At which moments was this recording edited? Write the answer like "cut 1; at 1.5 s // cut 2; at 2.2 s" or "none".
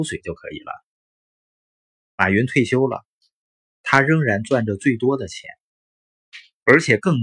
none

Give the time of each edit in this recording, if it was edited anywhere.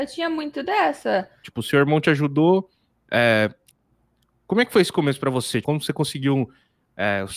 cut 1; at 1.4 s // cut 2; at 2.9 s // cut 3; at 5.6 s

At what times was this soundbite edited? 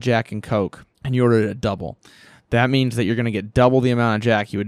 cut 1; at 0.9 s

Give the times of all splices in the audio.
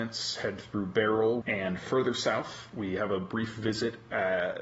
cut 1; at 1.4 s

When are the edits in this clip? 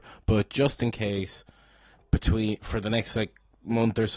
none

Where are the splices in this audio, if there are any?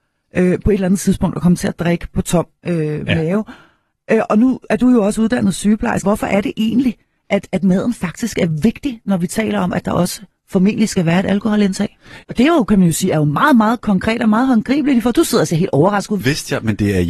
cut 1; at 6.0 s // cut 2; at 12.2 s // cut 3; at 16.2 s

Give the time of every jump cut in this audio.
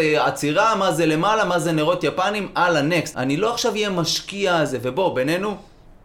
cut 1; at 3.1 s

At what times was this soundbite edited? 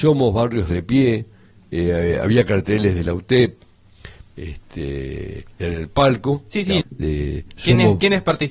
cut 1; at 4.3 s // cut 2; at 6.8 s

